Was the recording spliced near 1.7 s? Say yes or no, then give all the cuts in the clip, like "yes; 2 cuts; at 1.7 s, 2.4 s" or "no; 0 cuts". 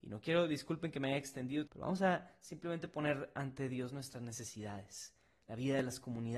yes; 1 cut; at 1.7 s